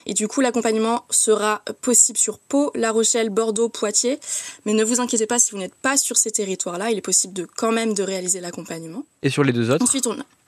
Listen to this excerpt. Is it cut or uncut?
uncut